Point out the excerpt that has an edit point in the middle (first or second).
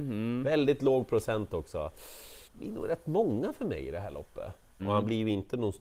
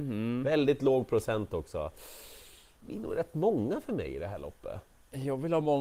first